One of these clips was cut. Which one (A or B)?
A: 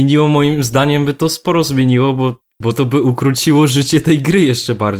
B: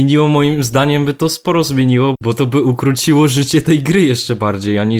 B